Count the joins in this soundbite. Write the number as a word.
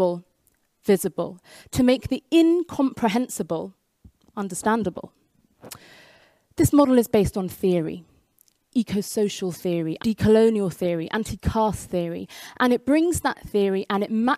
one